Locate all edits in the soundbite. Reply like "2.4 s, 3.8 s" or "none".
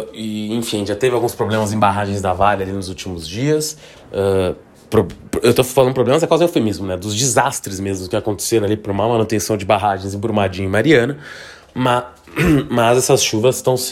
3.9 s